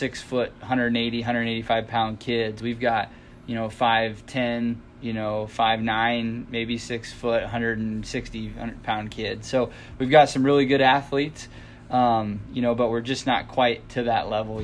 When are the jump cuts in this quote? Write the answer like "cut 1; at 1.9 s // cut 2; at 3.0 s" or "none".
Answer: none